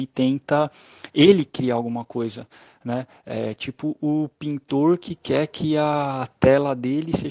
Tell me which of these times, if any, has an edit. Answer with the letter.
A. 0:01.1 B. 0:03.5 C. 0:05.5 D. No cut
D